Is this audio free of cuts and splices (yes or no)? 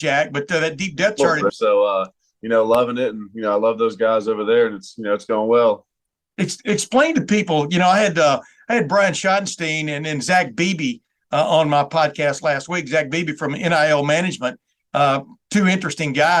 no